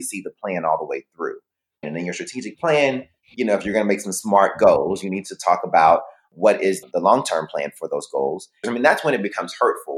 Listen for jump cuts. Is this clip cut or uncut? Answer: cut